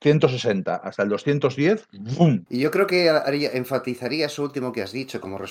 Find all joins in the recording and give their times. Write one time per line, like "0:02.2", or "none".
0:02.5